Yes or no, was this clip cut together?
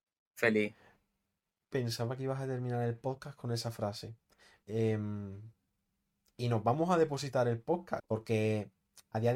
yes